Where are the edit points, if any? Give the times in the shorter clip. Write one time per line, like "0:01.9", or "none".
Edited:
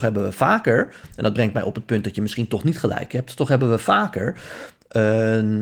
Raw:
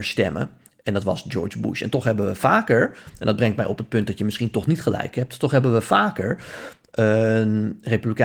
none